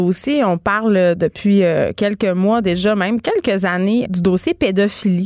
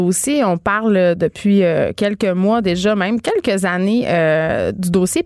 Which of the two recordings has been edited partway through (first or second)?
first